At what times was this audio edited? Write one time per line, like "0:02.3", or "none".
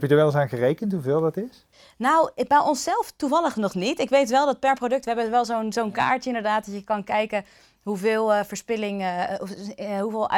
none